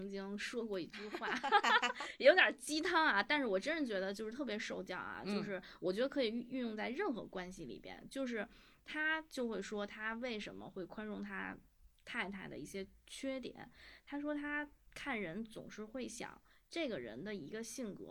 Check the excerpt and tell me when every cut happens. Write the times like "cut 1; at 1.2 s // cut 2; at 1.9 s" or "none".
none